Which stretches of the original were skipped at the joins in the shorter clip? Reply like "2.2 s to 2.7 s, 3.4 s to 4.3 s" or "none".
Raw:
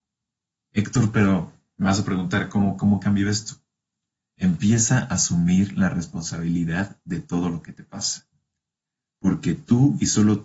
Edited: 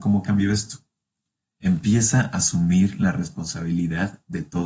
none